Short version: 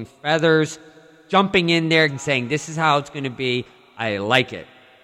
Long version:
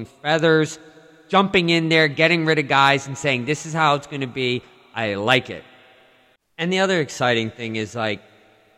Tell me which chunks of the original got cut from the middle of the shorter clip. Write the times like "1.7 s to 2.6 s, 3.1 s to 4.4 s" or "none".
2.1 s to 3.0 s